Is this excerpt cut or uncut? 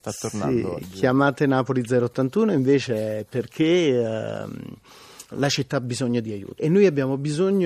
cut